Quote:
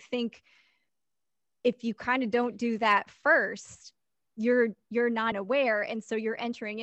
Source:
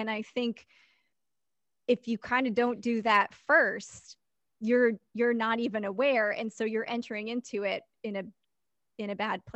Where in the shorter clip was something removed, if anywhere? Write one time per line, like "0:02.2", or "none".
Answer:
0:05.3